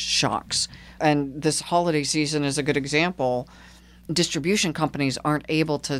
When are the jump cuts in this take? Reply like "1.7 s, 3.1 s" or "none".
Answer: none